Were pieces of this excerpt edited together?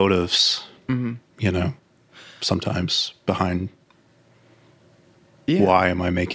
no; 0 cuts

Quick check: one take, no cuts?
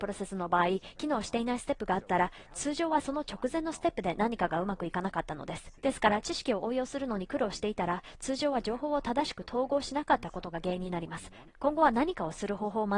no; 2 cuts; at 5.8 s, 11.5 s

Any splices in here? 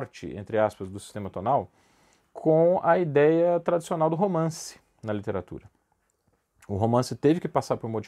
no; 0 cuts

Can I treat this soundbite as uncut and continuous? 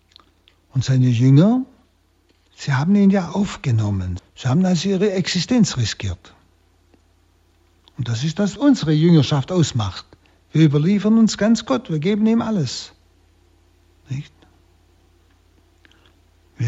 no; 2 cuts; at 4.2 s, 8.6 s

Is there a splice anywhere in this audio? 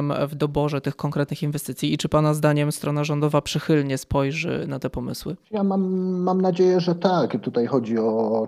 yes; 1 cut; at 5.4 s

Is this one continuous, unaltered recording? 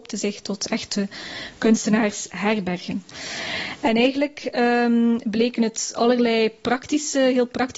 yes; 0 cuts

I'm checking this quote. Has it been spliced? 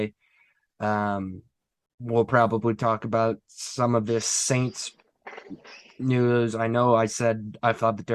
no; 0 cuts

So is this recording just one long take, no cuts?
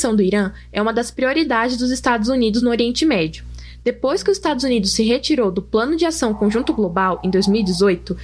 yes; 0 cuts

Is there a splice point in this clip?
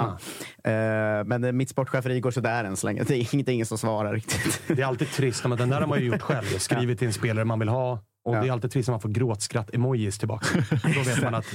no; 0 cuts

